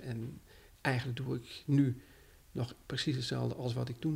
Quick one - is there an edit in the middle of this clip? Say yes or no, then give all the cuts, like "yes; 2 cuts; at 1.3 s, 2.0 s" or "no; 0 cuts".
no; 0 cuts